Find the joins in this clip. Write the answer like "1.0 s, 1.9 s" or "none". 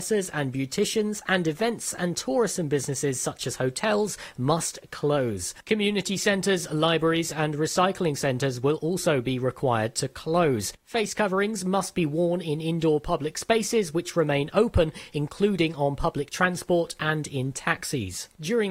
none